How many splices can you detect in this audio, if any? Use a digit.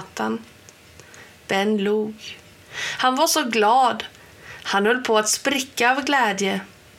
0